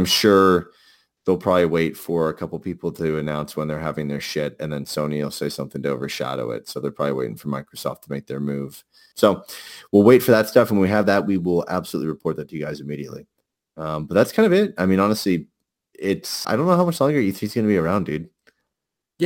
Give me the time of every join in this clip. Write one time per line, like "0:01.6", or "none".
0:09.1
0:16.4